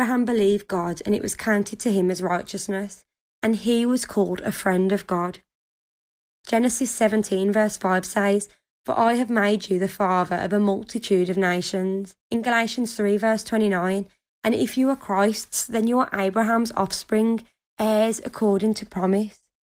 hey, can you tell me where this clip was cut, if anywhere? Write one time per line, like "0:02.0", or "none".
0:12.2